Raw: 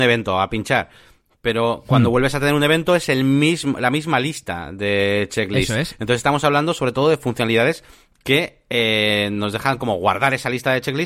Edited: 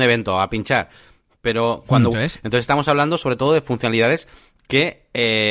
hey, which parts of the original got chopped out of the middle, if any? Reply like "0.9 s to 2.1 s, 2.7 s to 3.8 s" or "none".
2.1 s to 5.7 s